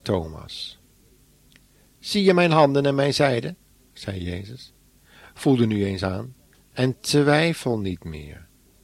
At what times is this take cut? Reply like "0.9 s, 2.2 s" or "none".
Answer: none